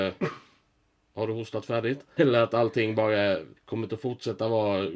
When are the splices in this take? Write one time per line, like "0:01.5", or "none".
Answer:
0:02.2
0:03.6